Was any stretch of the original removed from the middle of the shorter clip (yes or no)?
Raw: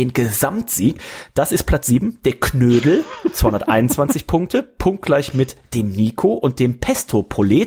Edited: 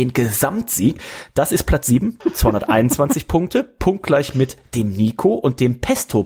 yes